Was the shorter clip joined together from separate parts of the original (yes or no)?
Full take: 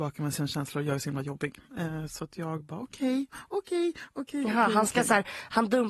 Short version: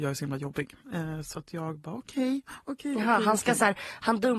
yes